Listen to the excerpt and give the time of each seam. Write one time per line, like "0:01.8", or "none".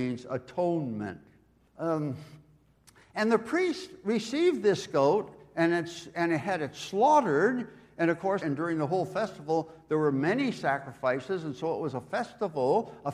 0:01.7
0:08.4